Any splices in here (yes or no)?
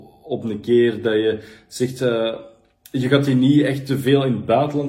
no